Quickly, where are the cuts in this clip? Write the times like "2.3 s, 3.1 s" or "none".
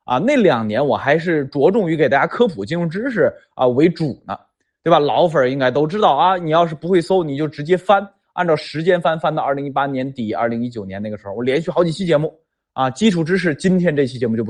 none